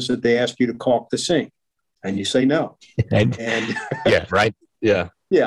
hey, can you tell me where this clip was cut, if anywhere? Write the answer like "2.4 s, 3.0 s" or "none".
4.3 s